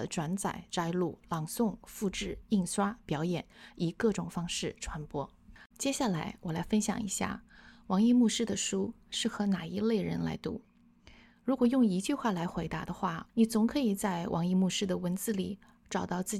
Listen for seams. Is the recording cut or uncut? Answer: cut